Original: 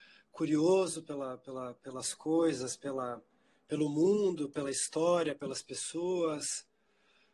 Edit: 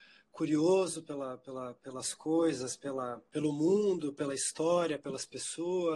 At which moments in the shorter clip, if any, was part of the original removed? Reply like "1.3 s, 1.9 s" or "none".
3.3 s